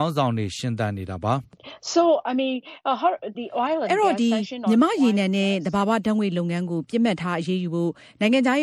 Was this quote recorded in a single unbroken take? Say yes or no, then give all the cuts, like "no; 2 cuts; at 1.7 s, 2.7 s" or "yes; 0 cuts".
no; 1 cut; at 3.3 s